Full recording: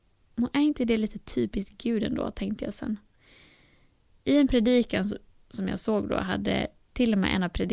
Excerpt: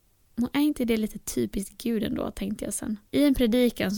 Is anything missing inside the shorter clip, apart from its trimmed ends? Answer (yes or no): yes